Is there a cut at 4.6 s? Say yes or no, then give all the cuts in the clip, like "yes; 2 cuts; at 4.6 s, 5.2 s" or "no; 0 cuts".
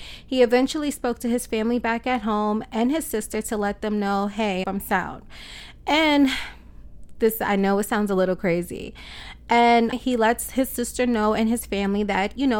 yes; 2 cuts; at 4.6 s, 9.9 s